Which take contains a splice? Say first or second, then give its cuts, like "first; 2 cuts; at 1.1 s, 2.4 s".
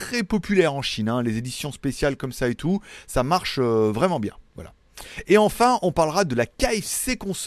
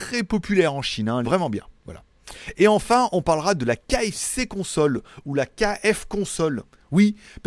second; 1 cut; at 1.2 s